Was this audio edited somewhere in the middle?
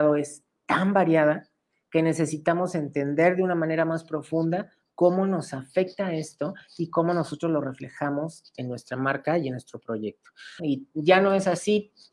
yes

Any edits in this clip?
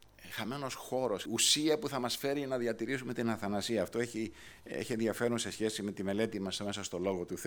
yes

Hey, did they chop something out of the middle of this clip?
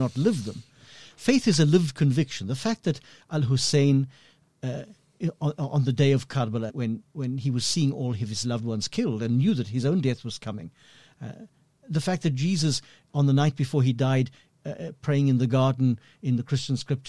yes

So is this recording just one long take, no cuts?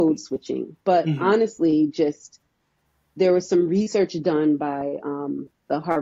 yes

